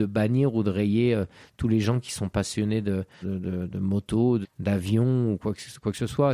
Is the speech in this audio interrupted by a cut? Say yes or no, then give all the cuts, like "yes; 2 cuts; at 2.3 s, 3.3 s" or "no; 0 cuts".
yes; 2 cuts; at 3.2 s, 4.4 s